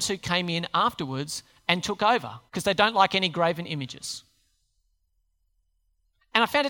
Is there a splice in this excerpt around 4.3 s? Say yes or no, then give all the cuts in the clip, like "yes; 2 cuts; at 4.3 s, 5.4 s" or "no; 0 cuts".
no; 1 cut; at 2.5 s